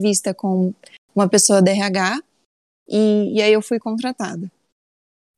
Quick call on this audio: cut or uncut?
cut